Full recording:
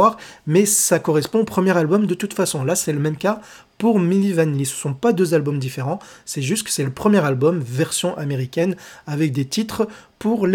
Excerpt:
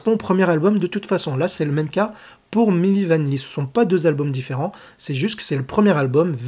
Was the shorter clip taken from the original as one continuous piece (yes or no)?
yes